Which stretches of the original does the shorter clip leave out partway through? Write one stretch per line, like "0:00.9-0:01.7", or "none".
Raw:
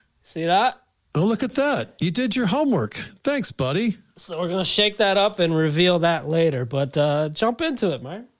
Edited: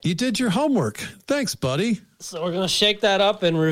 none